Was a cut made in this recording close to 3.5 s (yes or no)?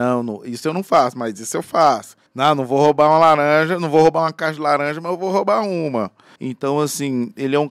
no